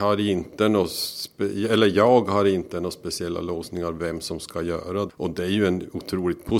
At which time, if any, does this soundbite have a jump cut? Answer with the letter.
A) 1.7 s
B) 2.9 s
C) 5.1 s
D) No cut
C